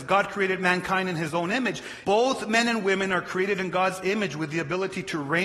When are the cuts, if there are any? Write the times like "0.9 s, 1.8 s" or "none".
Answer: 2.0 s